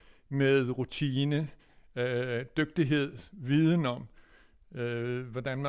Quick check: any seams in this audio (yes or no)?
no